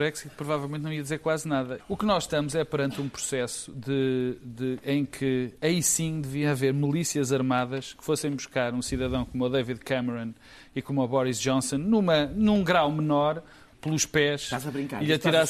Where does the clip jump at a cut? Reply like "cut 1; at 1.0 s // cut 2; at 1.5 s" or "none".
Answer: cut 1; at 1.8 s // cut 2; at 13.7 s